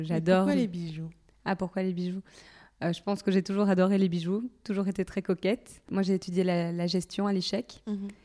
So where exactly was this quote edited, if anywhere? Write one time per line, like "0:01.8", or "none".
none